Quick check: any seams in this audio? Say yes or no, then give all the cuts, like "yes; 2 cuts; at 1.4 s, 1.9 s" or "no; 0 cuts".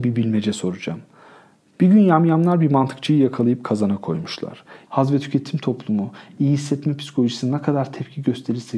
yes; 2 cuts; at 1.7 s, 4.9 s